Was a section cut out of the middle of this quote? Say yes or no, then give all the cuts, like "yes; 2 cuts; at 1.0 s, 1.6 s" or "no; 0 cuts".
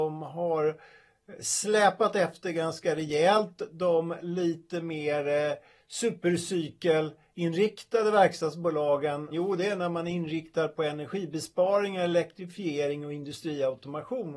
yes; 1 cut; at 9.3 s